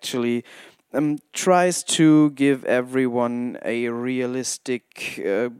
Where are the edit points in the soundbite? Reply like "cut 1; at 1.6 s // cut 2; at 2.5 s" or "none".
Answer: none